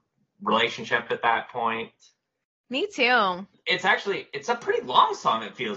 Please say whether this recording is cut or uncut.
cut